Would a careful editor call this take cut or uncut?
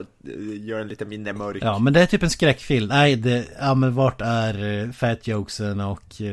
uncut